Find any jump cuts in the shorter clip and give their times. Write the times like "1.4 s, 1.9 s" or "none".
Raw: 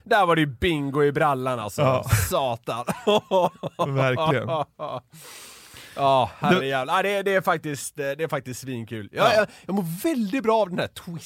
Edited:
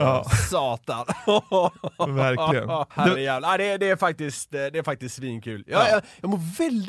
2.9 s